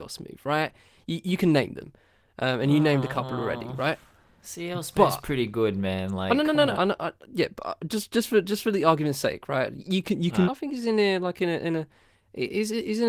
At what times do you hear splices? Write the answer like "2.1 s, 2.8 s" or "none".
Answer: 6.7 s, 10.4 s